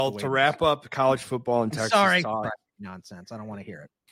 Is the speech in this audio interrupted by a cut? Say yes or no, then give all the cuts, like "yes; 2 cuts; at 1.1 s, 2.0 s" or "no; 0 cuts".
yes; 1 cut; at 2.4 s